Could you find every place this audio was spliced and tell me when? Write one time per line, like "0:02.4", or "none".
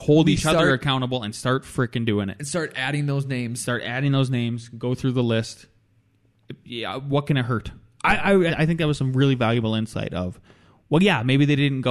0:08.5